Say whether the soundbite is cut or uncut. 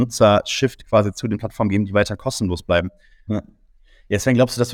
cut